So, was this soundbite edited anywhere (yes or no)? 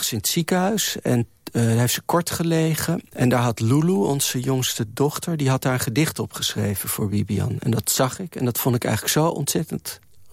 yes